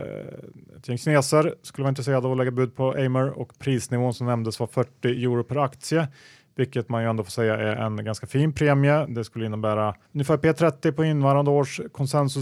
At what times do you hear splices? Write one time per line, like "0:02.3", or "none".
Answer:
0:10.0